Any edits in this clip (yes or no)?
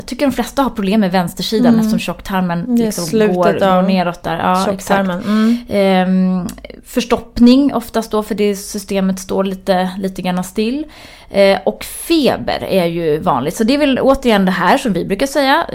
yes